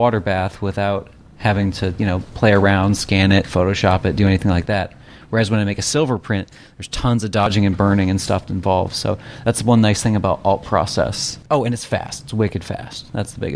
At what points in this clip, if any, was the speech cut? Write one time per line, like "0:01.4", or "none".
none